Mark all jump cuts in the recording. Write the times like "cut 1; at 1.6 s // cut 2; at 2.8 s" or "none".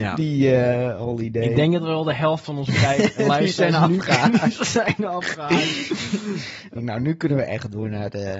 cut 1; at 6.7 s